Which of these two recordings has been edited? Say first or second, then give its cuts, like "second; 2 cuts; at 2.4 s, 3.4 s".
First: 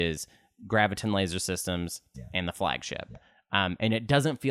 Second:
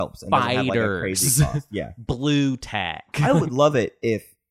first; 1 cut; at 2.1 s